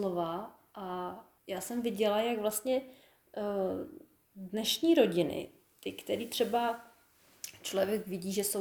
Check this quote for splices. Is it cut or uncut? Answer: cut